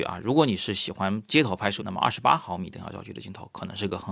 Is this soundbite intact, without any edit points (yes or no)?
no